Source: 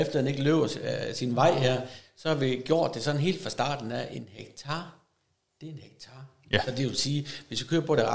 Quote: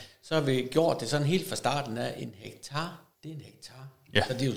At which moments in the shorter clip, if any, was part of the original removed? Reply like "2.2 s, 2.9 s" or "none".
3.1 s